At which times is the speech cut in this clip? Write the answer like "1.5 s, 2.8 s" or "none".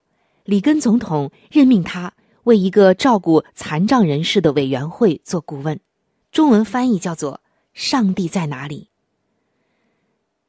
6.2 s